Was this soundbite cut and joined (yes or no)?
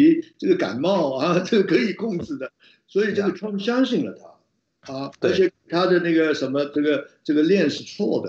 no